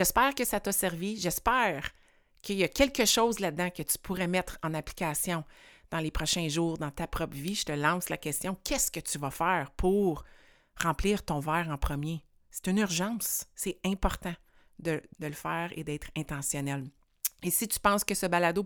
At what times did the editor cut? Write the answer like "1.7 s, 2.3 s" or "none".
15.1 s